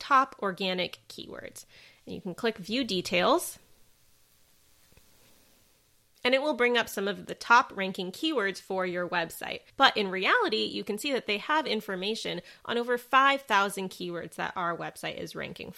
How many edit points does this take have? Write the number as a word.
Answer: one